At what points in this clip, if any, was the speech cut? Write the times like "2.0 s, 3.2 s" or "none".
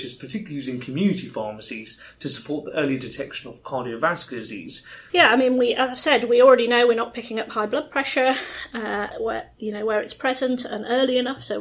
5.1 s, 9.1 s